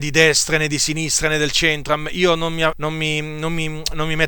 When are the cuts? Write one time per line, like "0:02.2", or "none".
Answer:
0:02.7